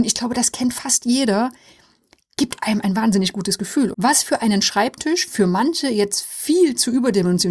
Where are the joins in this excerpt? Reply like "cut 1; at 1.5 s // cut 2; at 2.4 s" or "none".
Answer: cut 1; at 2.8 s // cut 2; at 3.9 s